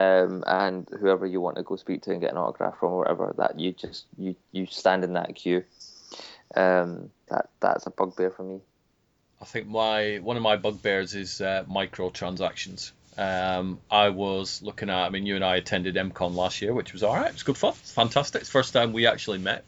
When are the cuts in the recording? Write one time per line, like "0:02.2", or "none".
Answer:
0:07.3
0:17.8